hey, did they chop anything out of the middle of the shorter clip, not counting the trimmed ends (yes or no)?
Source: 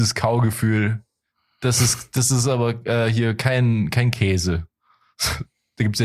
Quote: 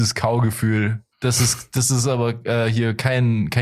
yes